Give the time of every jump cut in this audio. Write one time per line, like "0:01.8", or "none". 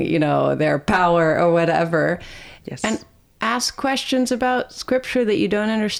0:02.6